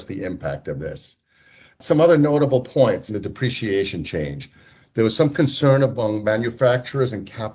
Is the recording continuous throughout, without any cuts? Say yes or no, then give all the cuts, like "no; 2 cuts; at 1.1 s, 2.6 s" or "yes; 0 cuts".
no; 1 cut; at 3.1 s